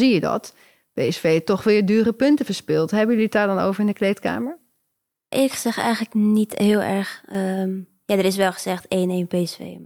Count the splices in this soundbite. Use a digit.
1